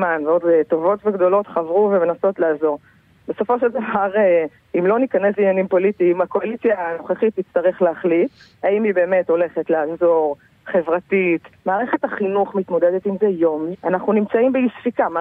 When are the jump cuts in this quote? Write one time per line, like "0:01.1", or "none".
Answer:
0:11.5
0:13.7